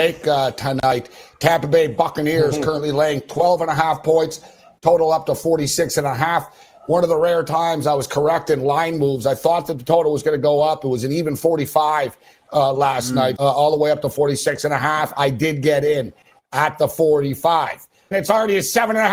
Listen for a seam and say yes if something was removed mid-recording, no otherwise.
yes